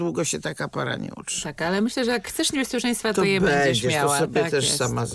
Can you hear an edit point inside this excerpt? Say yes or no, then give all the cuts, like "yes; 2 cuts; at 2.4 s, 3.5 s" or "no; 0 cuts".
no; 0 cuts